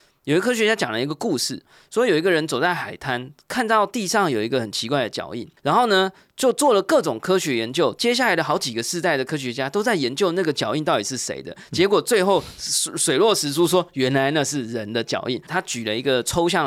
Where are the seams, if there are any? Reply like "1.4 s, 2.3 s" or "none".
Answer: 5.6 s, 15.5 s